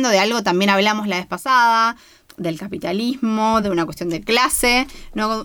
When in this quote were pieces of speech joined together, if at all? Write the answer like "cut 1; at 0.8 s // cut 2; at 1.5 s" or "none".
cut 1; at 3.6 s